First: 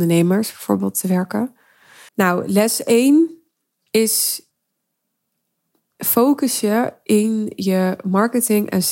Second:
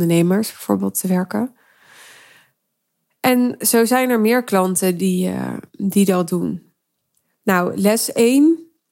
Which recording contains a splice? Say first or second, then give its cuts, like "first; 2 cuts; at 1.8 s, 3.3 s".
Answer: first; 1 cut; at 2.1 s